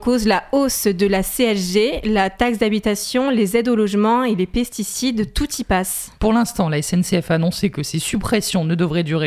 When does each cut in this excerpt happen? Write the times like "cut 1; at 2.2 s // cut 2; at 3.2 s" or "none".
cut 1; at 6.2 s

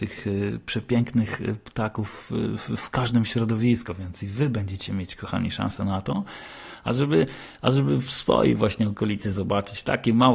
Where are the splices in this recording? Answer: none

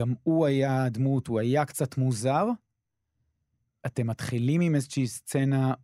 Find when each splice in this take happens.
none

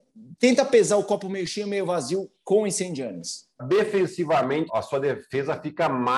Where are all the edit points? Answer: cut 1; at 3.6 s // cut 2; at 4.7 s

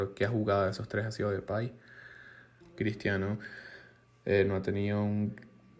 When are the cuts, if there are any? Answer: cut 1; at 2.6 s

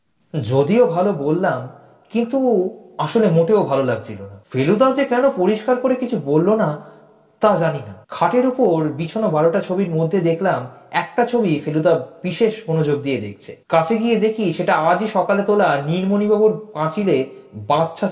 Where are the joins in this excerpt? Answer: cut 1; at 4.4 s // cut 2; at 8.0 s // cut 3; at 13.6 s

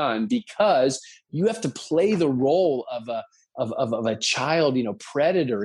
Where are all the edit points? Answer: none

